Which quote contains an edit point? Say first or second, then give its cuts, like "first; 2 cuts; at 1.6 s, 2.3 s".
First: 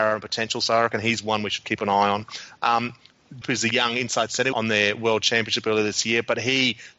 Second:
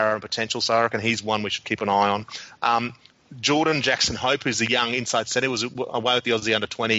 first; 2 cuts; at 3.4 s, 4.5 s